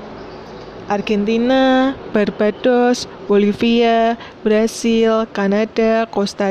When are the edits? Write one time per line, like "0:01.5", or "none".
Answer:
none